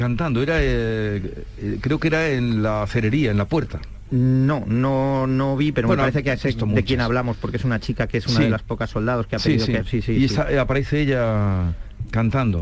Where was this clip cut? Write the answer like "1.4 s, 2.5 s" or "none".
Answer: 5.7 s, 9.8 s